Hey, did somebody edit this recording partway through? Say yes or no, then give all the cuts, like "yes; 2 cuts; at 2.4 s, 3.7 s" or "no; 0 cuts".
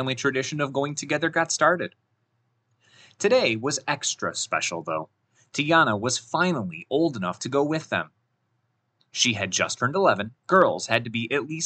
yes; 1 cut; at 10.4 s